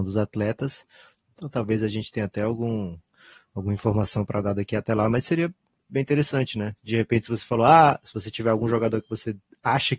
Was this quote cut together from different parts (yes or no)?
no